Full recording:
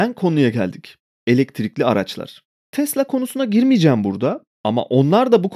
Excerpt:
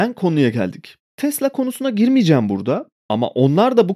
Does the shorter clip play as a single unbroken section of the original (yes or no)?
no